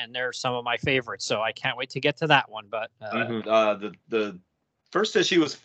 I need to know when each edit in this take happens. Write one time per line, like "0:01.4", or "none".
0:03.4